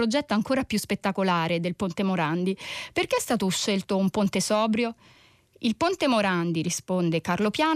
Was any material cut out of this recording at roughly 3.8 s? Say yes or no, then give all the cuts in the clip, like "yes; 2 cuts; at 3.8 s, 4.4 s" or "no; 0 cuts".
no; 0 cuts